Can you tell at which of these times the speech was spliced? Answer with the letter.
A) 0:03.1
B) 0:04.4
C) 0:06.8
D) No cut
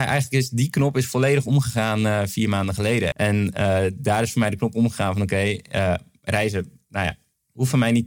A